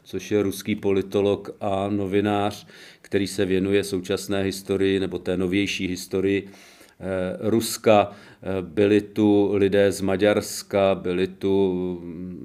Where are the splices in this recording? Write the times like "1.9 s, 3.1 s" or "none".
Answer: none